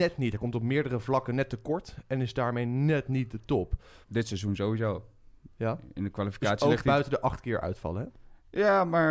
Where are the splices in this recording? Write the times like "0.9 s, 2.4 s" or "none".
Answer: 4.0 s

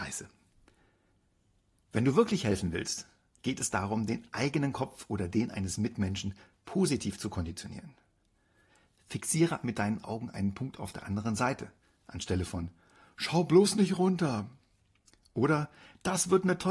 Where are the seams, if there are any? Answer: 9.6 s

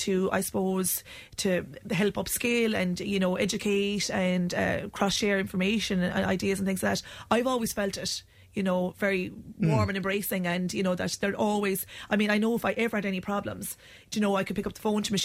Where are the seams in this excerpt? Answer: none

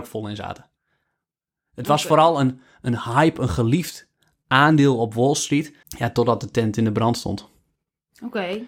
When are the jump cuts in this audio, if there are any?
5.8 s

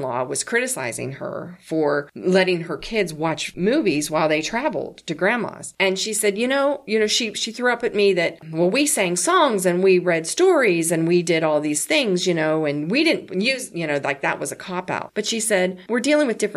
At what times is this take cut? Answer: none

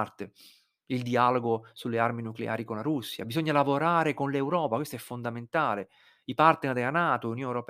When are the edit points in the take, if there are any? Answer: none

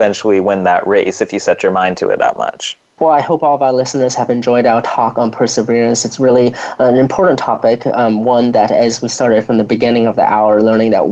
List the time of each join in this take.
3.0 s

